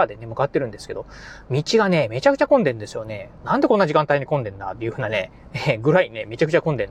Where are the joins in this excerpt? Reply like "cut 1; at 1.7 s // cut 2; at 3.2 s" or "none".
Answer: none